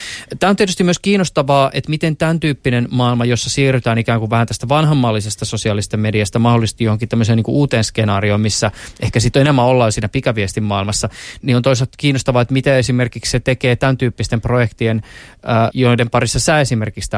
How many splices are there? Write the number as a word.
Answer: two